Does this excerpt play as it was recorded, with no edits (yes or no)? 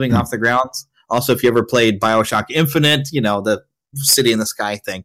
yes